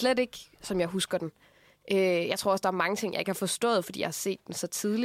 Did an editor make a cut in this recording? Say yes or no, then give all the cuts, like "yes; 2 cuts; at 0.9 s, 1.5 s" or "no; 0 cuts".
no; 0 cuts